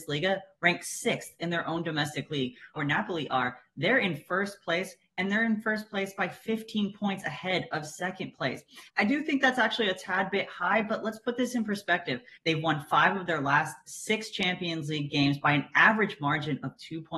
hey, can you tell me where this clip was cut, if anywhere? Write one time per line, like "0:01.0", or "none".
0:02.8
0:08.9
0:12.4